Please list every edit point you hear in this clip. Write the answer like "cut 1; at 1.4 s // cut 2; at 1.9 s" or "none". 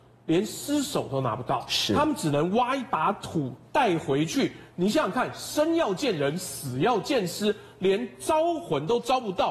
none